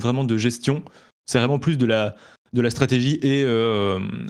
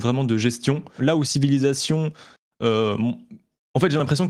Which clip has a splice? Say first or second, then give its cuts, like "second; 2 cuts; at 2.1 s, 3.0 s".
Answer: second; 1 cut; at 1.0 s